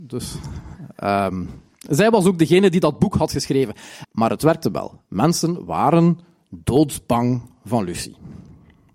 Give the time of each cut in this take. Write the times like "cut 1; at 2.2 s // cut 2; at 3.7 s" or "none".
cut 1; at 4.0 s